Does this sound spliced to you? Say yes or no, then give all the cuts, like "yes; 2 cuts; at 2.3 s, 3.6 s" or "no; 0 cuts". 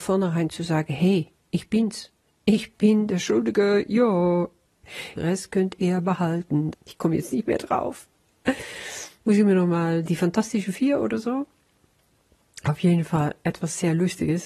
yes; 2 cuts; at 5.2 s, 6.7 s